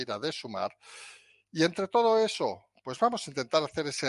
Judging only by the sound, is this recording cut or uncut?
uncut